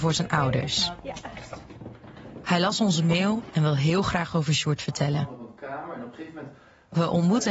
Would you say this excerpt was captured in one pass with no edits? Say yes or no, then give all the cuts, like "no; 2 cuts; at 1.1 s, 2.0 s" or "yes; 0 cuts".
yes; 0 cuts